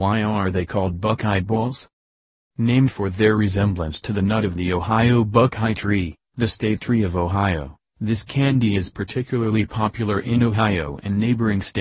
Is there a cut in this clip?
no; 0 cuts

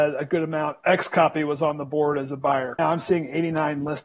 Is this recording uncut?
no; 1 cut; at 2.8 s

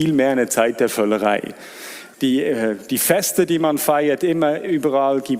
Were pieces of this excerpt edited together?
yes; 1 cut; at 2.1 s

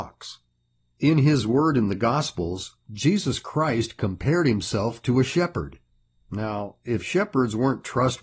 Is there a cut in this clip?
yes; 1 cut; at 6.2 s

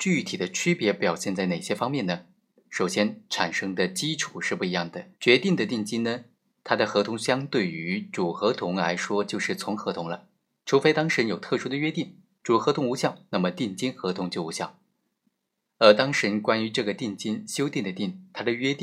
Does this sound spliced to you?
yes; 1 cut; at 5.1 s

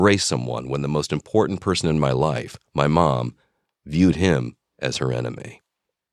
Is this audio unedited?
yes; 0 cuts

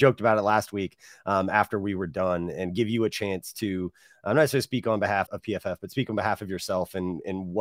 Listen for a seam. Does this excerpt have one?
yes; 1 cut; at 5.3 s

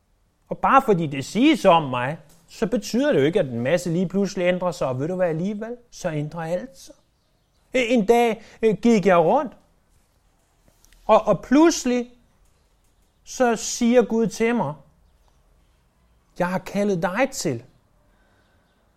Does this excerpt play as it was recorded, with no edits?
no; 2 cuts; at 5.9 s, 7.5 s

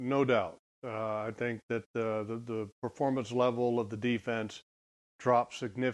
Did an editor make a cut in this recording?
no; 0 cuts

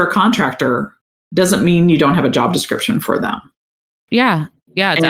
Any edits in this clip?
no; 0 cuts

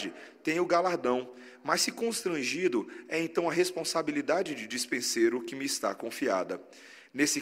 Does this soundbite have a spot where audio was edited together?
no; 0 cuts

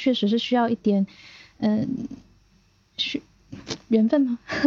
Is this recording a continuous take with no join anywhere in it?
yes; 0 cuts

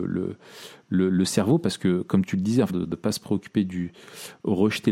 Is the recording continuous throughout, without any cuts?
no; 1 cut; at 2.7 s

